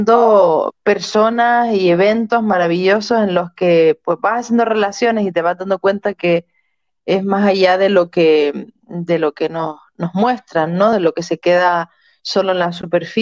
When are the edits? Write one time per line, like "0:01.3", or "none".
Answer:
none